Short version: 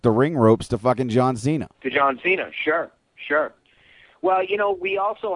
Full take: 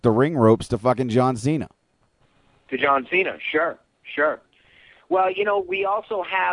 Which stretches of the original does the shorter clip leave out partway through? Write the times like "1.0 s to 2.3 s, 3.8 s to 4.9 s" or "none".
1.7 s to 2.6 s